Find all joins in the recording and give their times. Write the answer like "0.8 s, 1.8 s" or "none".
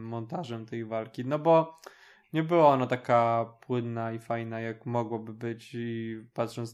none